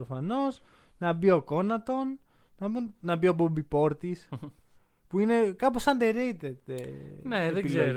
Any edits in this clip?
no; 0 cuts

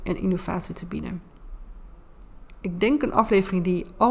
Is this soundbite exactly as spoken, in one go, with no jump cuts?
no; 1 cut; at 2.6 s

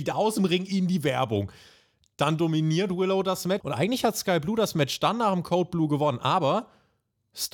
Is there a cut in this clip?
yes; 1 cut; at 3.6 s

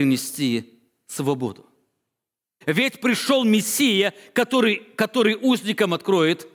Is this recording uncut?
no; 1 cut; at 2.6 s

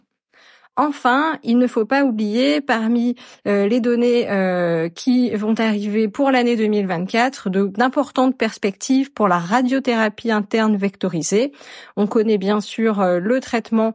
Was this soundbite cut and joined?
no; 0 cuts

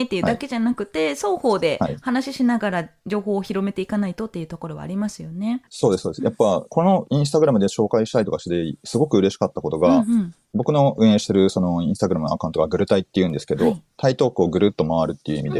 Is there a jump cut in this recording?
yes; 1 cut; at 5.7 s

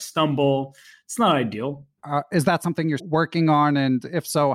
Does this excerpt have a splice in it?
yes; 2 cuts; at 2.0 s, 3.0 s

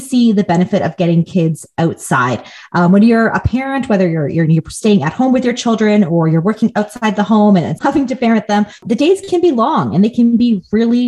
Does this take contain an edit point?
yes; 1 cut; at 7.8 s

